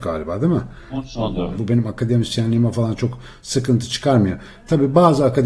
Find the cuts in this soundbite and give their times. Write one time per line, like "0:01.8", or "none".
0:01.5